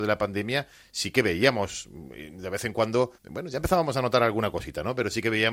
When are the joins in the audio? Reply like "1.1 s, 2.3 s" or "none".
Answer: 3.2 s